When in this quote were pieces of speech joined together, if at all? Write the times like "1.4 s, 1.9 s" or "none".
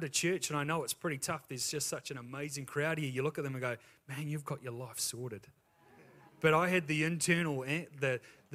none